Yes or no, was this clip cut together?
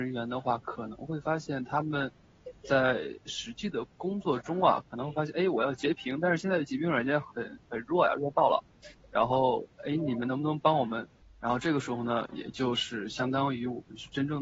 yes